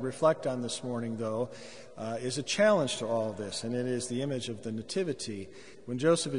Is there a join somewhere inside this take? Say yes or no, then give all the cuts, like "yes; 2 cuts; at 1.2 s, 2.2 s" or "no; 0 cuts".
no; 0 cuts